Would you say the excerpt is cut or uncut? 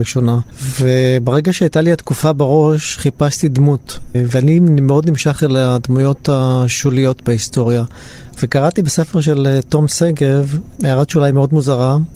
cut